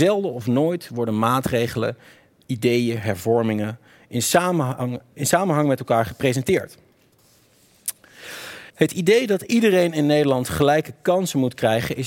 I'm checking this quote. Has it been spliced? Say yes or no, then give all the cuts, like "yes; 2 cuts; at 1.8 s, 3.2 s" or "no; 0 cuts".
yes; 2 cuts; at 5.1 s, 8.7 s